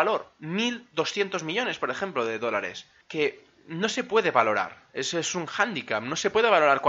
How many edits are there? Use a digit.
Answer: 1